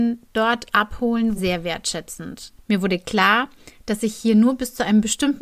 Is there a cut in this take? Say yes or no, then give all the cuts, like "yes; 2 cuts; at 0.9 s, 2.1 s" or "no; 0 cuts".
yes; 2 cuts; at 1.4 s, 2.6 s